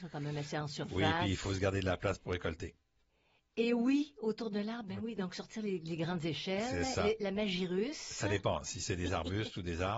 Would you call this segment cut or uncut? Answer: uncut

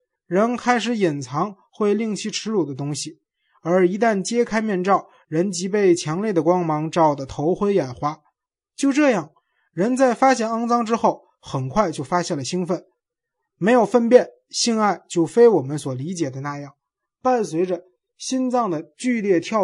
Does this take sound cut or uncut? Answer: uncut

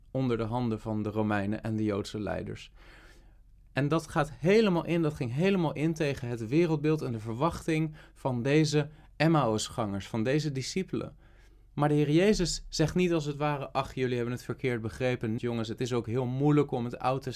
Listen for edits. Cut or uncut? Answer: cut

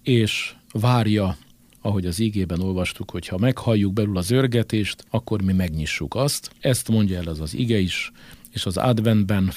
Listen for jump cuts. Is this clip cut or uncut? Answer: cut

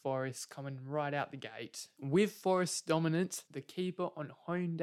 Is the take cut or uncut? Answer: cut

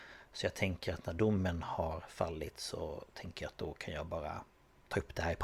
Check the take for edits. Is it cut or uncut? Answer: uncut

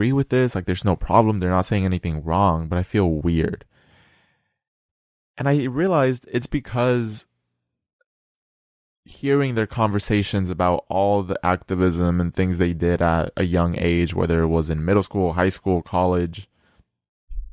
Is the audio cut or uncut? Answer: uncut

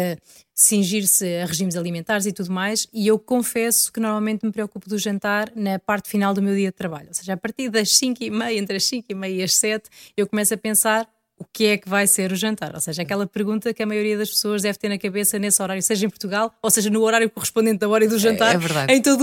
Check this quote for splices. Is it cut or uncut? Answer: uncut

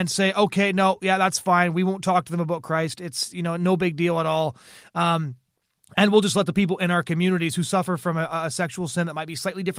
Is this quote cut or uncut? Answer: uncut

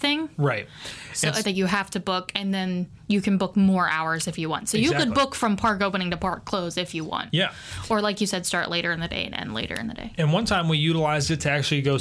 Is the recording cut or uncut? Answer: cut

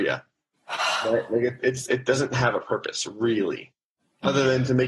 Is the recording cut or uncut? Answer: uncut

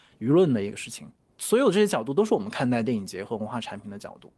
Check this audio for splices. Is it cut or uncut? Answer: uncut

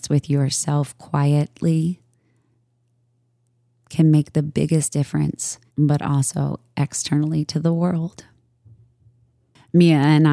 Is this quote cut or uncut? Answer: cut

